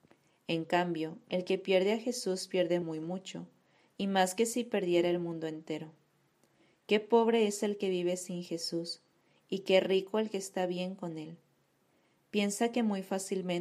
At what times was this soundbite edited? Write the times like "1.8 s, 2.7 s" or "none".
none